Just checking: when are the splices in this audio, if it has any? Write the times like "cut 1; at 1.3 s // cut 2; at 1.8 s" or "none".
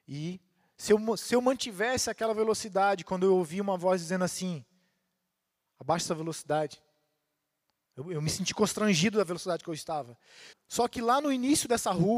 cut 1; at 10.5 s